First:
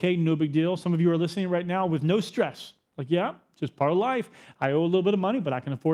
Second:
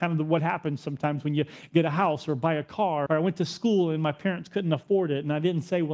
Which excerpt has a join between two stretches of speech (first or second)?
second